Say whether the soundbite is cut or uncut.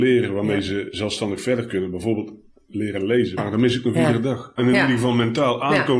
cut